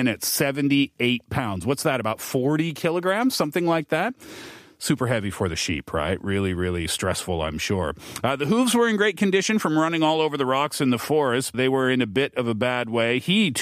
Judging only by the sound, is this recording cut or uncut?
cut